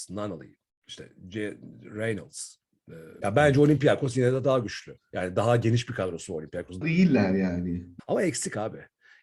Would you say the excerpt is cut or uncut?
cut